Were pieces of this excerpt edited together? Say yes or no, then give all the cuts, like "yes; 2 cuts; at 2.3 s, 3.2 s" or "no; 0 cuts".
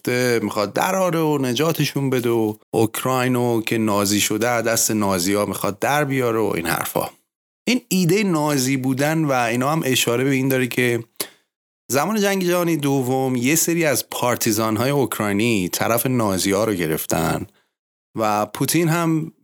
yes; 1 cut; at 2.6 s